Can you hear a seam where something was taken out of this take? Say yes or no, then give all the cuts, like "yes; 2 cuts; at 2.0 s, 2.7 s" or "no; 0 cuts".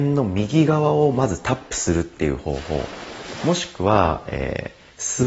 no; 0 cuts